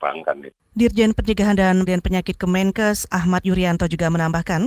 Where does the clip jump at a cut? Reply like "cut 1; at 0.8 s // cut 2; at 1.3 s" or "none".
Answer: cut 1; at 1.9 s